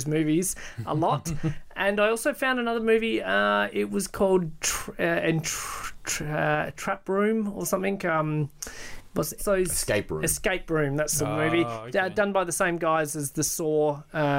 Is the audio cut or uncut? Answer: cut